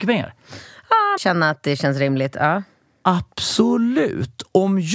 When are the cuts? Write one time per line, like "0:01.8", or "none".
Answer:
0:01.2

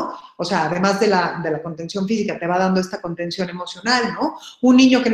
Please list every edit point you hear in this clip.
none

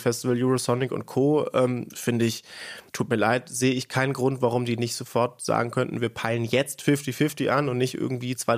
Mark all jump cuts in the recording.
0:02.9

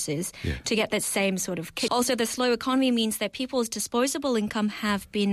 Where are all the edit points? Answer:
0:01.9

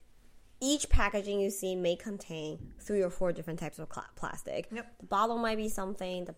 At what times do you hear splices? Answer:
none

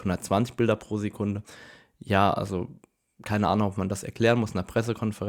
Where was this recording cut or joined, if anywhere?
none

